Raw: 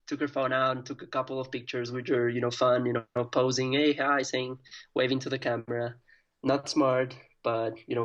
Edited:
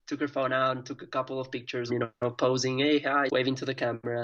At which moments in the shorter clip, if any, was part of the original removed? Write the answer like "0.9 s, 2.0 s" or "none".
1.9 s, 3.3 s